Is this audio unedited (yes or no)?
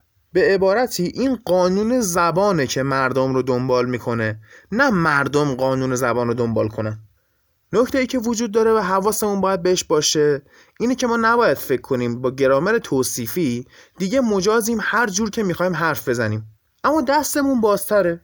yes